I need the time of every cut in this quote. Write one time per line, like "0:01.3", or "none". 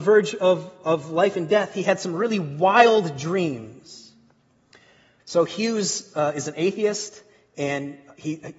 0:05.2